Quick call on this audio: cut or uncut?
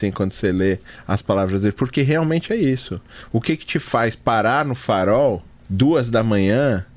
uncut